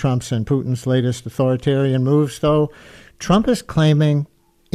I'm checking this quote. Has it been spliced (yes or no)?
no